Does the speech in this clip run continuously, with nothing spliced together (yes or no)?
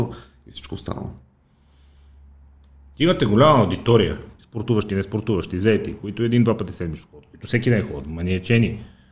no